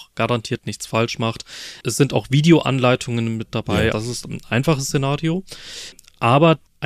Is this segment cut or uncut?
cut